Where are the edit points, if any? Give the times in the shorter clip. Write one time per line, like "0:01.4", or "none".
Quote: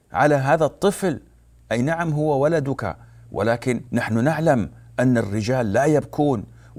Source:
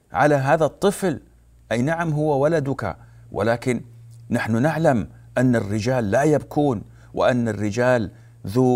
0:03.9